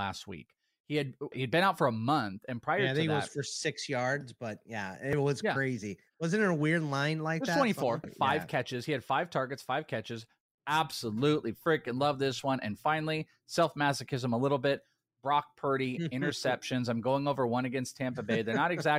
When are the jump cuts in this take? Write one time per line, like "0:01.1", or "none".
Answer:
0:01.3
0:08.0
0:10.6